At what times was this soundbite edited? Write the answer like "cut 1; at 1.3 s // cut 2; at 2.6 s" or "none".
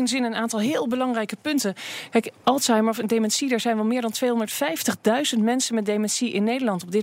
cut 1; at 2.4 s